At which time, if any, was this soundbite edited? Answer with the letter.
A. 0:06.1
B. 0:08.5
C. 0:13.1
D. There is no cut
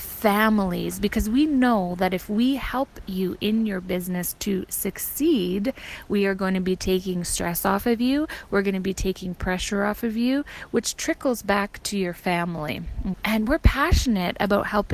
C